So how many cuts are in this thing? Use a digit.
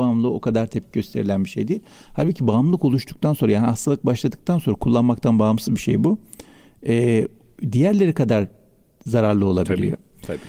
0